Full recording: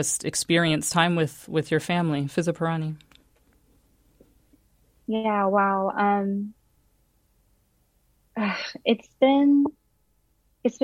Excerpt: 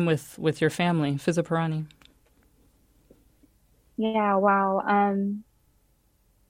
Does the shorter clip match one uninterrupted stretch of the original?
yes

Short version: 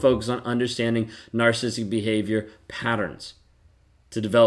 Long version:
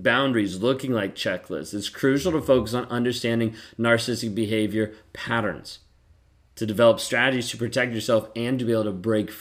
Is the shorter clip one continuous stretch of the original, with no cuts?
yes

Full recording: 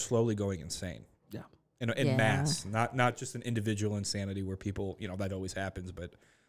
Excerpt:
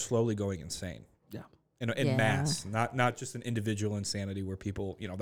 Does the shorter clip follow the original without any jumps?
yes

